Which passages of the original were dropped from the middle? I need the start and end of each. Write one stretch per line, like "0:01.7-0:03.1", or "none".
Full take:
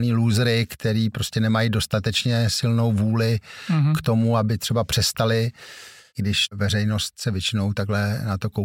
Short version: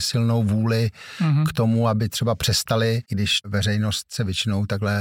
0:05.5-0:06.1